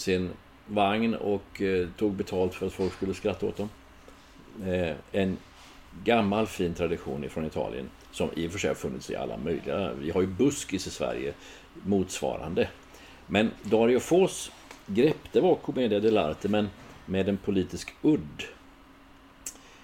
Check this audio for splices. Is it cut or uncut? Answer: uncut